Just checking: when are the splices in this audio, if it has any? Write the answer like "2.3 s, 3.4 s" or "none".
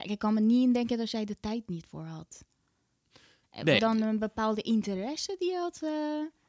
3.8 s